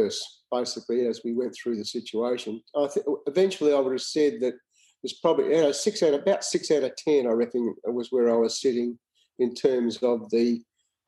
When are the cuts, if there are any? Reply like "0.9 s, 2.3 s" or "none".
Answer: none